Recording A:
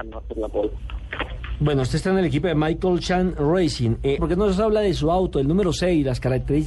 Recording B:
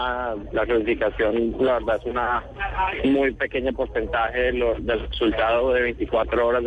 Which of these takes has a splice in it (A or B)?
A